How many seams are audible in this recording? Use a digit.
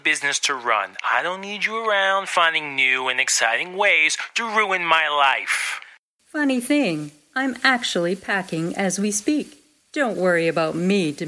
1